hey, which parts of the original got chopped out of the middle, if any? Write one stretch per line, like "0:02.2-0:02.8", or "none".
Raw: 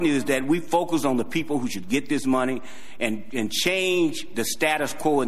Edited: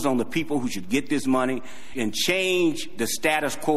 0:02.9-0:03.3